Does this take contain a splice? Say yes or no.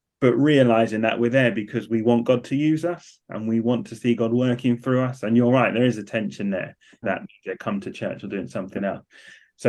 yes